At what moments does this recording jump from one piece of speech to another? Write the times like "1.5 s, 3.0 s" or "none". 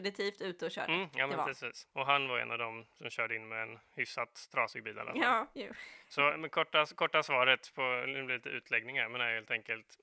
1.9 s